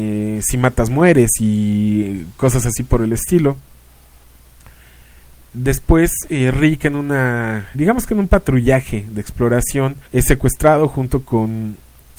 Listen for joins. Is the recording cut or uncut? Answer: cut